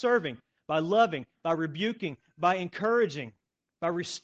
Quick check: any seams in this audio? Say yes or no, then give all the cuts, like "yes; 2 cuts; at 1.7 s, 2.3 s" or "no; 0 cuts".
no; 0 cuts